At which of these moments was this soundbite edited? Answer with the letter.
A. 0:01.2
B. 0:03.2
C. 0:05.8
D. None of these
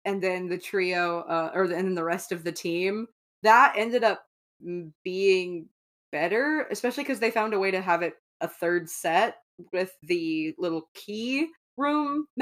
D